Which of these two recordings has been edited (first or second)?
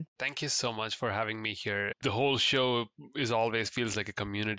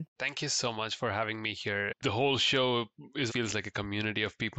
second